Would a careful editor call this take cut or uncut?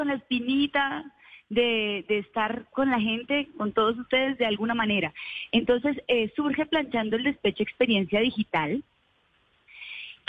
uncut